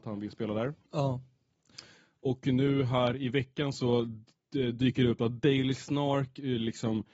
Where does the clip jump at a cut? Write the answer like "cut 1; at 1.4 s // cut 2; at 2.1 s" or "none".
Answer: none